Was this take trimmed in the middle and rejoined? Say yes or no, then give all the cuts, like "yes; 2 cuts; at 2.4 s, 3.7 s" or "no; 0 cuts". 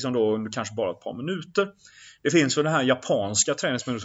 no; 0 cuts